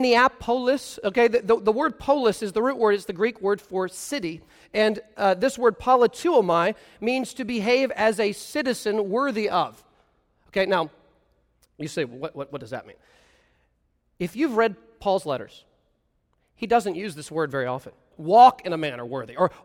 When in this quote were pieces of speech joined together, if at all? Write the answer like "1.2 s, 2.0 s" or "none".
18.1 s